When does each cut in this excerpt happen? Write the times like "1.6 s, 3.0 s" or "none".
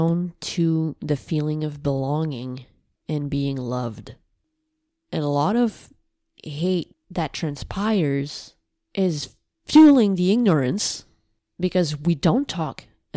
none

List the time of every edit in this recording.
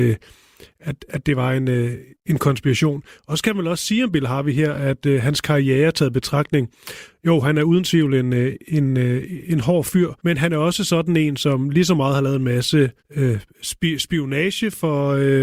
10.2 s, 13.0 s

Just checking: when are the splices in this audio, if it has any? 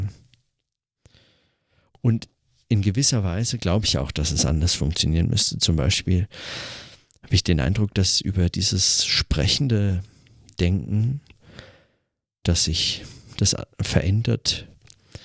12.4 s

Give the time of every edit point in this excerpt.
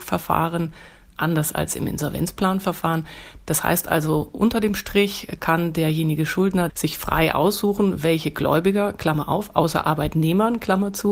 3.4 s, 6.7 s

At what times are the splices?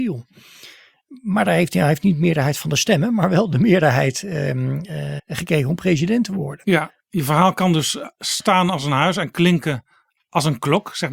5.2 s

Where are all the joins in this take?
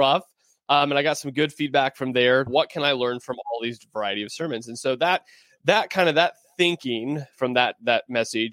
2.5 s

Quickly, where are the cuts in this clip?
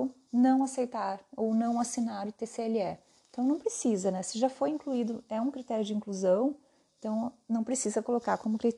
none

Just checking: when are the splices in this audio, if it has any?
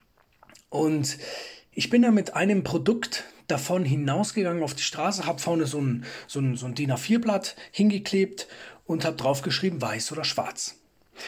none

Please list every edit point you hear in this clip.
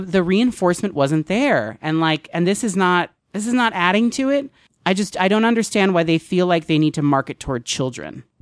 none

